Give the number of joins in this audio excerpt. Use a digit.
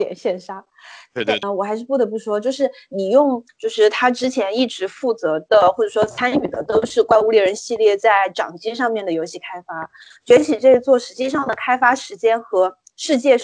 2